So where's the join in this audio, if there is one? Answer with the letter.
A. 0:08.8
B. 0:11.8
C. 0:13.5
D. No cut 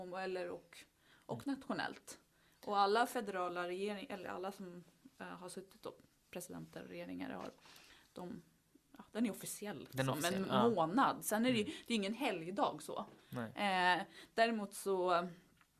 A